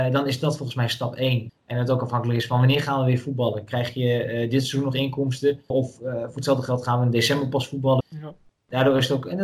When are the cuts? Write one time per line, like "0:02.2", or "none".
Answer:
0:01.5
0:05.7
0:08.0